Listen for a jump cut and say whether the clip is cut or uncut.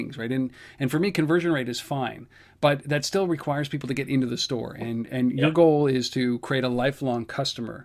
uncut